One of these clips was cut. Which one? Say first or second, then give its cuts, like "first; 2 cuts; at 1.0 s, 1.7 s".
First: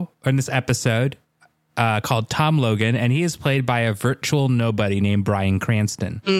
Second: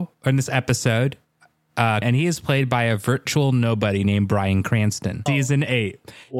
second; 2 cuts; at 2.0 s, 5.3 s